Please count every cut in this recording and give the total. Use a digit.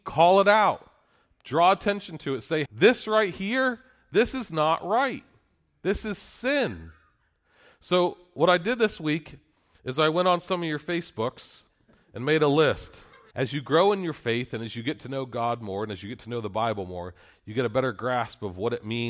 2